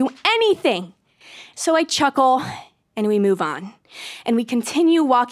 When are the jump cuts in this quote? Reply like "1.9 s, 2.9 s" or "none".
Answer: 1.5 s